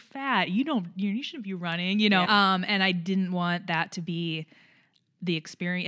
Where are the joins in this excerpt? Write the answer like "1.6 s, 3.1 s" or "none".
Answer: 2.2 s